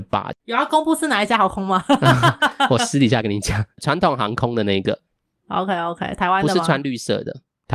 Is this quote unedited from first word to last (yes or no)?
yes